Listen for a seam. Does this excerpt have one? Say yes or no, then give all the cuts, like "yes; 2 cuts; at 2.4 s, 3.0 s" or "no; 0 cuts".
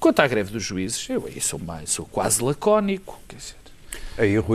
yes; 1 cut; at 1.6 s